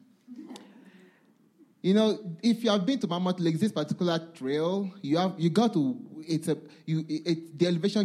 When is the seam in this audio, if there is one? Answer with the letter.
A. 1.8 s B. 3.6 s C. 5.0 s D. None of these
D